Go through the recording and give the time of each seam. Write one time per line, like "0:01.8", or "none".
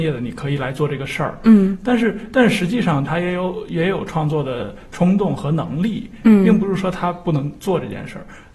0:03.1